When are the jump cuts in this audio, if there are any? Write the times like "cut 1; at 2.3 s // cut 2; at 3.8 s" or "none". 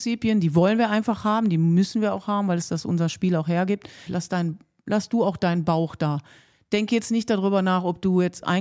cut 1; at 4.1 s